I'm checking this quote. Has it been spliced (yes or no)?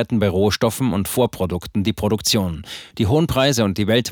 no